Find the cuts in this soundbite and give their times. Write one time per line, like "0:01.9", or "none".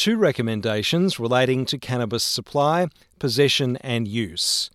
none

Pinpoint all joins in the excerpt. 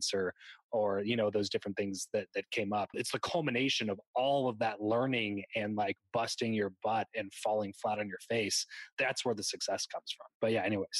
0:02.9

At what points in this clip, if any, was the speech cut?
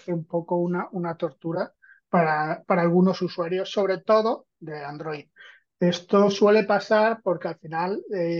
none

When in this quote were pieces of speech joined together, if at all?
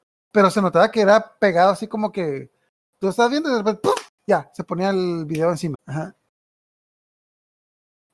0:05.7

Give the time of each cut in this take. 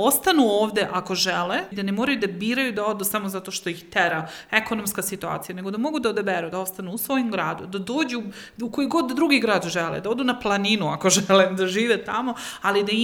0:01.7

